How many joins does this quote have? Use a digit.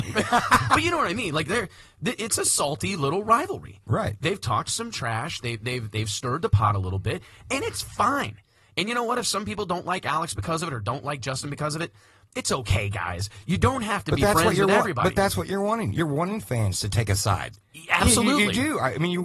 0